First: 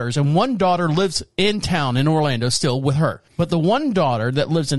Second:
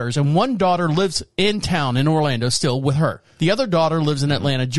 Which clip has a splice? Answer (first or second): first